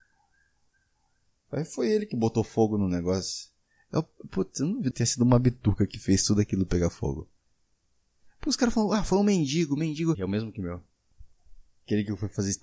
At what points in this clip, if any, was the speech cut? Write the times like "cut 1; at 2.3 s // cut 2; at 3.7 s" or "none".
cut 1; at 4.9 s // cut 2; at 10.1 s